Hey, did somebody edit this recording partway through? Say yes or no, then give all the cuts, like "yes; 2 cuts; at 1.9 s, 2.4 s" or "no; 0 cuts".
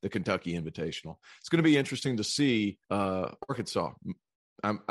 yes; 1 cut; at 2.8 s